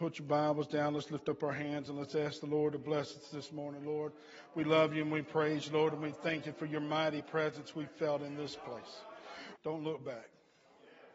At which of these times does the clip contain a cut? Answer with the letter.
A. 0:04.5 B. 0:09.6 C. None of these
B